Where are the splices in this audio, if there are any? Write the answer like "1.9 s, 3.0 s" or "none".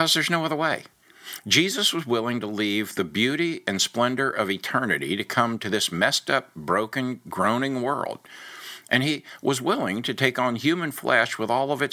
none